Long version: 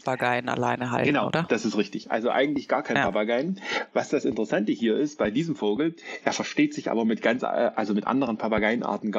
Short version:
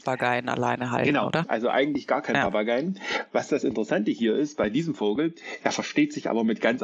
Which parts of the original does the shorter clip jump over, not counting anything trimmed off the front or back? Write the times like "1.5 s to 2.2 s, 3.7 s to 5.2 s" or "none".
1.4 s to 2.0 s